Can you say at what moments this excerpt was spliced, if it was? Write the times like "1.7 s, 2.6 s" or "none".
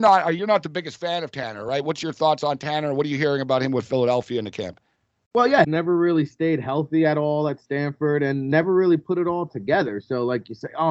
5.6 s